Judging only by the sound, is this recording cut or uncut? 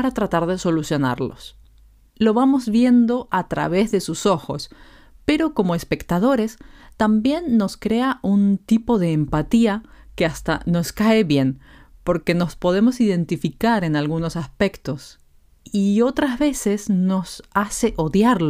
cut